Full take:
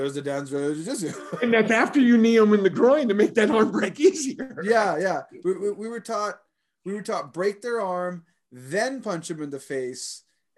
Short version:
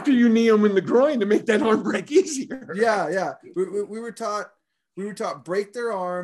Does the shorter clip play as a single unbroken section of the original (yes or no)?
yes